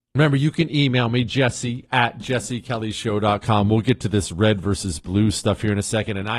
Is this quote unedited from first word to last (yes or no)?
yes